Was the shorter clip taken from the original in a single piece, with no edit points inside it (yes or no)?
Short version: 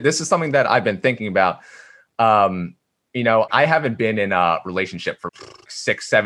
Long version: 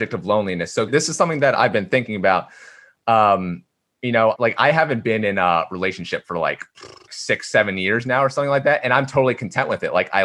no